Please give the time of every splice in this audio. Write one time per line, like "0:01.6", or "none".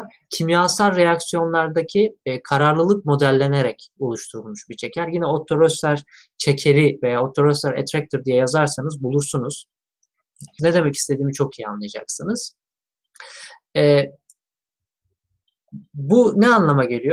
0:10.6